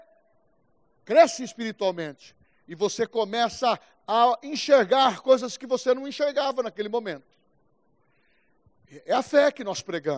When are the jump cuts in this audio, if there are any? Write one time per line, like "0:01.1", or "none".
none